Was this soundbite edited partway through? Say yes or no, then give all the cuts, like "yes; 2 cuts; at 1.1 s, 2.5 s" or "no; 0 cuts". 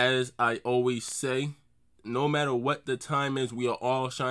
no; 0 cuts